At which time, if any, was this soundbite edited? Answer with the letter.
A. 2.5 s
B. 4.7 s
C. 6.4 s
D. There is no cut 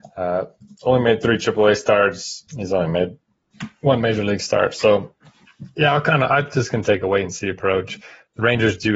A